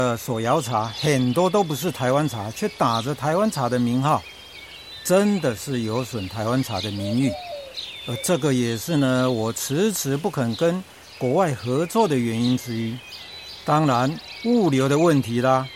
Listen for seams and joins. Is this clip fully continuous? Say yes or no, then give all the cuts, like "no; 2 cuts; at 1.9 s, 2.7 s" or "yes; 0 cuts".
yes; 0 cuts